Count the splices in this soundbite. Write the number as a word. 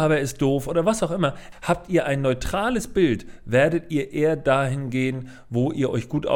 one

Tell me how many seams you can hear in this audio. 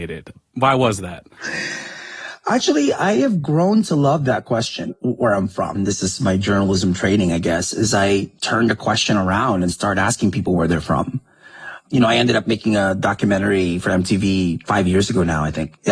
one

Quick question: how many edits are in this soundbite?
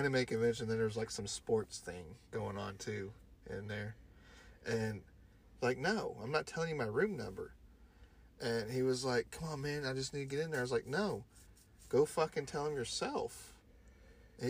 one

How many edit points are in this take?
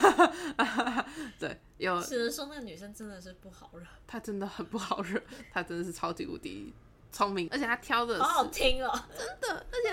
one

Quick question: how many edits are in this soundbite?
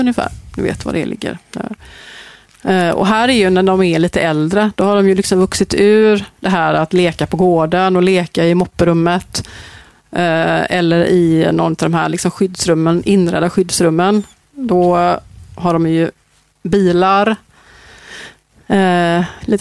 zero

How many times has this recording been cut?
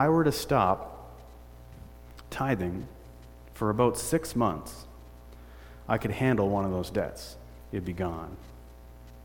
zero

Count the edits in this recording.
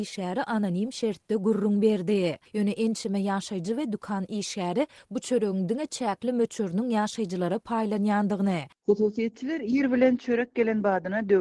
two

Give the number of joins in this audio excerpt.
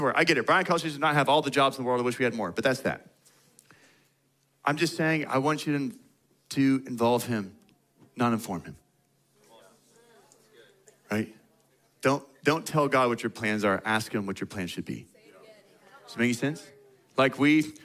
zero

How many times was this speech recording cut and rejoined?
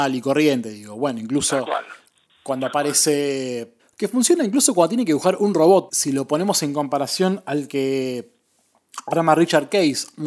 two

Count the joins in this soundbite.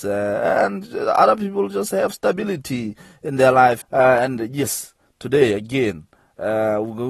one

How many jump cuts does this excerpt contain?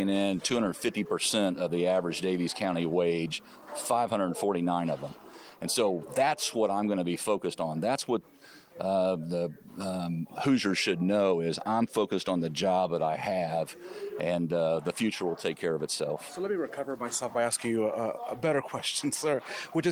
zero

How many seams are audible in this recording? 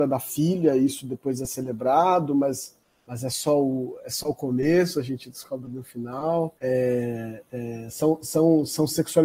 one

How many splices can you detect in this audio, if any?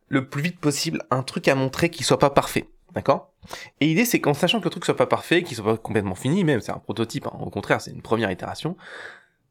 zero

